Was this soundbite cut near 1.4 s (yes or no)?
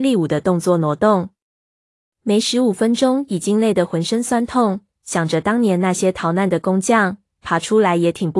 no